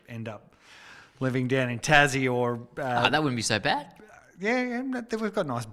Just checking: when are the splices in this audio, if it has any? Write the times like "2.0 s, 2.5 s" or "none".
none